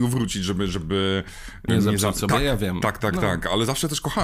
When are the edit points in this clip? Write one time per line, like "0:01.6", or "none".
0:01.7